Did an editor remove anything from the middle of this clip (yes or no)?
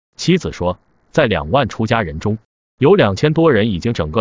no